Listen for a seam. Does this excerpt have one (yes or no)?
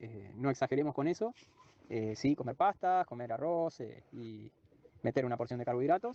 no